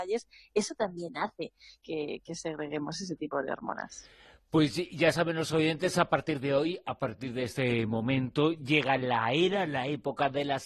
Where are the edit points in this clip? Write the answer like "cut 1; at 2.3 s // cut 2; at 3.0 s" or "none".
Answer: none